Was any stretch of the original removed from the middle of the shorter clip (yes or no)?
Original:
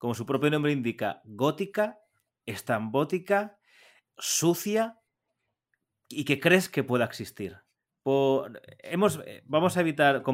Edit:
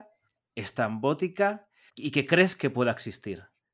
yes